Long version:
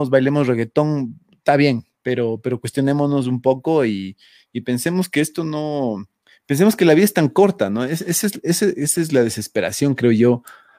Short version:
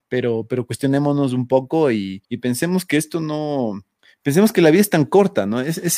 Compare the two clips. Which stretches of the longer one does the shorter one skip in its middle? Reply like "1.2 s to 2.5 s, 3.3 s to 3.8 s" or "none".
4.2 s to 4.5 s